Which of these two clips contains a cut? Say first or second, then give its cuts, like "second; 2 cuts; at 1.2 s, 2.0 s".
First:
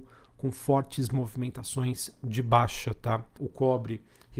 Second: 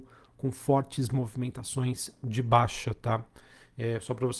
first; 1 cut; at 3.4 s